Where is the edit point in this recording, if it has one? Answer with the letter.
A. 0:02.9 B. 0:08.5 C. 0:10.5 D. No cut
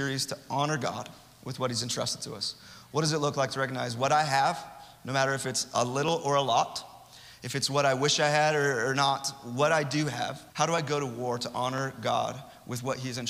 C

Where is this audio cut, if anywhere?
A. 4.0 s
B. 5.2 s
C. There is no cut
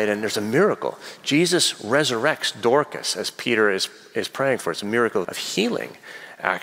B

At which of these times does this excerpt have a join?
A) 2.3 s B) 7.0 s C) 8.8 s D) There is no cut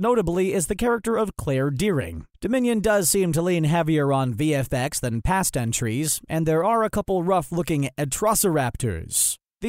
A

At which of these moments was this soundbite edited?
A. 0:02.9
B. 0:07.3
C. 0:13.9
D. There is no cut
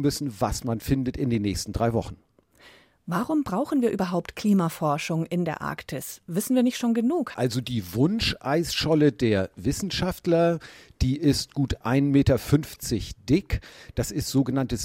B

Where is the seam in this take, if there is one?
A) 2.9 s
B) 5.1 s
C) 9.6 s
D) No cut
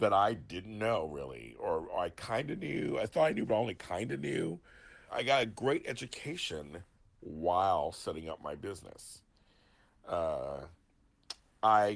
B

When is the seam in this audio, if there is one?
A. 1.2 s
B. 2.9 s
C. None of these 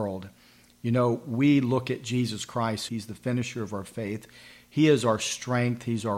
B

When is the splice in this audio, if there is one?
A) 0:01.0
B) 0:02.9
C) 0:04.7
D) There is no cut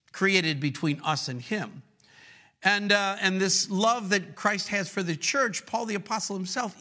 D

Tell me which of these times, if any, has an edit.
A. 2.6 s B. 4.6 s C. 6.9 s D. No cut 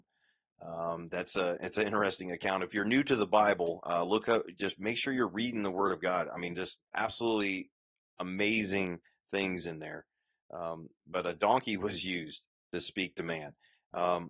C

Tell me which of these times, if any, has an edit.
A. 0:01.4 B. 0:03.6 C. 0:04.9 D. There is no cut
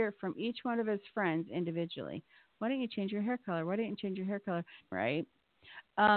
C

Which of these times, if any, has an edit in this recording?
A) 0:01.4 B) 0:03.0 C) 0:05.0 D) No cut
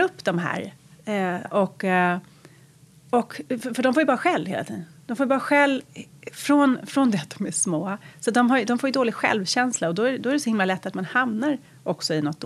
A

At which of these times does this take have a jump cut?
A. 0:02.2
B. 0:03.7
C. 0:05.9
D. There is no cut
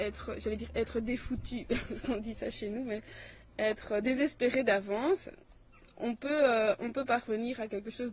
D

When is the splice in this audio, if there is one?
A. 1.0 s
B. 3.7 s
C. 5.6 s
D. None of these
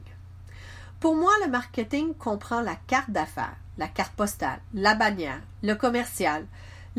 C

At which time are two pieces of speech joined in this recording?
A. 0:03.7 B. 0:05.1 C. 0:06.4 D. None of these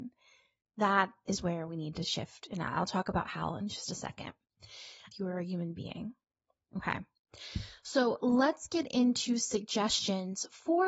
B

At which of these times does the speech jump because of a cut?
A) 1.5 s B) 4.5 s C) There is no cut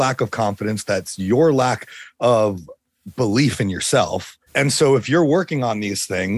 B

